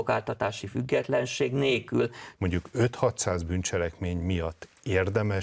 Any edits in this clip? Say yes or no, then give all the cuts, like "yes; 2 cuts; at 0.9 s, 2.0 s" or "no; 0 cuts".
yes; 1 cut; at 2.4 s